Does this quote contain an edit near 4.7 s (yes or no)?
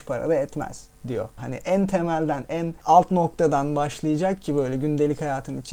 no